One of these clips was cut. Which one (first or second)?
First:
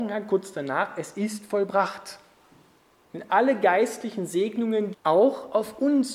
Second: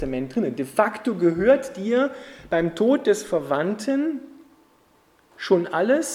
first